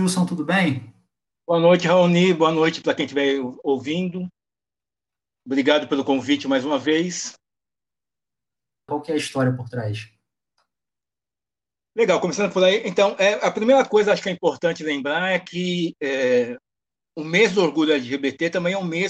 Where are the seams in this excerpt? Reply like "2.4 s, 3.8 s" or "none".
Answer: 8.9 s